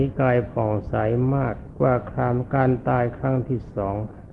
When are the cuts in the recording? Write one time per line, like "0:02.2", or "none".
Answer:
none